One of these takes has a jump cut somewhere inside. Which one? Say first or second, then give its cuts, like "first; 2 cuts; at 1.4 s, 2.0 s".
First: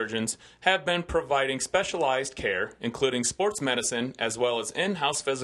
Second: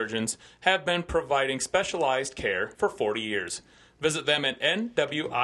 second; 1 cut; at 2.7 s